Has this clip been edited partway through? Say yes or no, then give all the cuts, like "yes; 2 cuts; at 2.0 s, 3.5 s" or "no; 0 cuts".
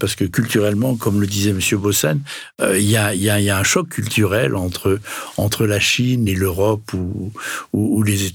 yes; 1 cut; at 6.3 s